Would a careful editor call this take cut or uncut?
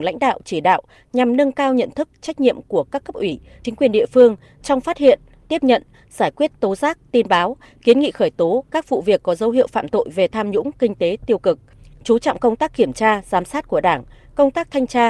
uncut